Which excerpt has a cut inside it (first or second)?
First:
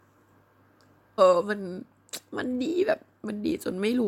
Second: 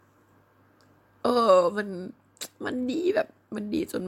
first